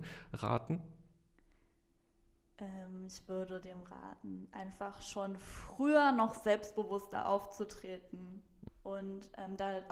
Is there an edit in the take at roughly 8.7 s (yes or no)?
yes